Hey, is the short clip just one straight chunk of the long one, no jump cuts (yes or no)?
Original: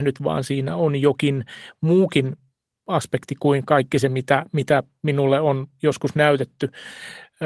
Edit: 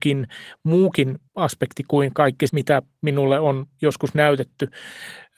no